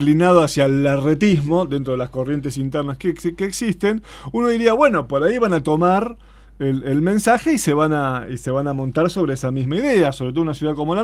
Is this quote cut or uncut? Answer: uncut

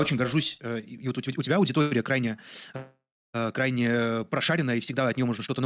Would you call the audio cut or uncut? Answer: uncut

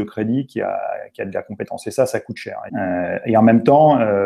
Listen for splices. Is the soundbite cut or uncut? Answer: cut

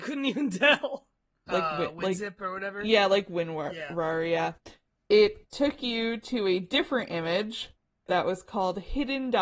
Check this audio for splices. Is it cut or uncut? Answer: cut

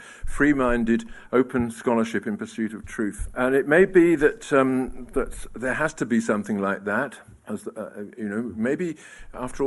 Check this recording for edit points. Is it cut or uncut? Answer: uncut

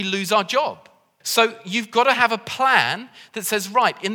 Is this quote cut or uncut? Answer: cut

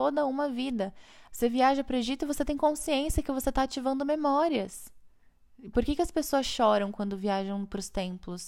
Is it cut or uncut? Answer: cut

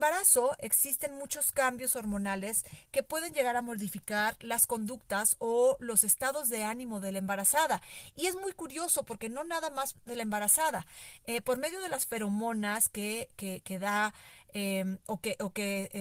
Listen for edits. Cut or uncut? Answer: uncut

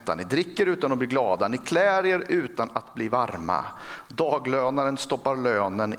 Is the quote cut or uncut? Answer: uncut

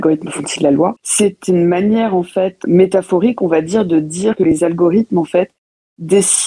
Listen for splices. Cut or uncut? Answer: cut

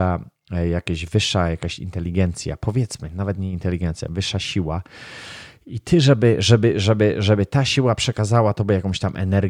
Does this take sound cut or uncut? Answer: uncut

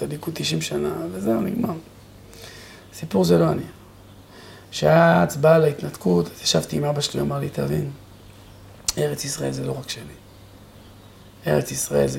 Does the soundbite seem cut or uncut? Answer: uncut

